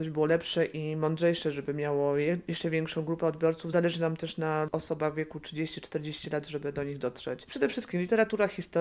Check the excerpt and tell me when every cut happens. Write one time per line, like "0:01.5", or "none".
none